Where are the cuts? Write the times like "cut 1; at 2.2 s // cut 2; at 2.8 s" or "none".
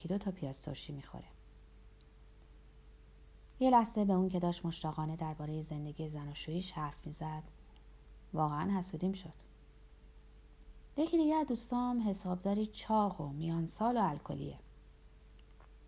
cut 1; at 3.5 s // cut 2; at 10.9 s